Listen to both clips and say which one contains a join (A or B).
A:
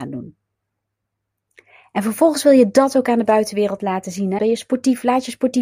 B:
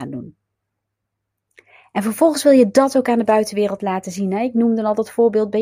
A